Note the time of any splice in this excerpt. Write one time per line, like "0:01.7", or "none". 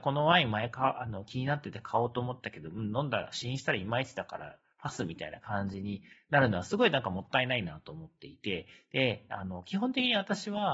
none